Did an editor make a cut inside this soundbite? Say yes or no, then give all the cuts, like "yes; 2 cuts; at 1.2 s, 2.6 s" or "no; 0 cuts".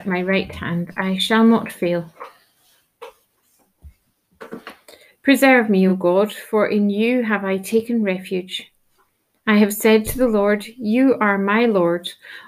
no; 0 cuts